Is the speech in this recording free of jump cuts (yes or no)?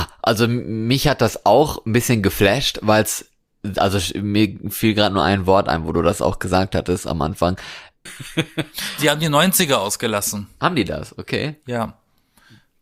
no